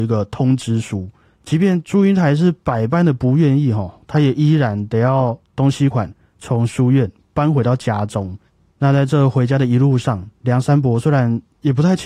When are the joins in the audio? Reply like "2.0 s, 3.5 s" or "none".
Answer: 5.9 s